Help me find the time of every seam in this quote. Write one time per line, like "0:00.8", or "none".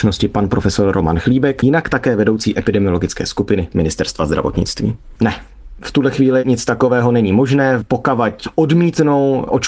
0:05.2